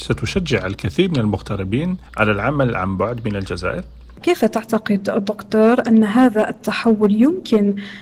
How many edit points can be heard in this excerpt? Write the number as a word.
one